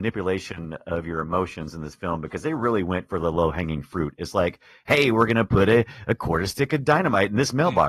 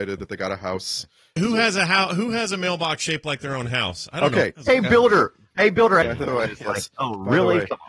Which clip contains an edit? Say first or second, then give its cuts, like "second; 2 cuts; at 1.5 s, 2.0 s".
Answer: second; 3 cuts; at 1.4 s, 4.6 s, 6.0 s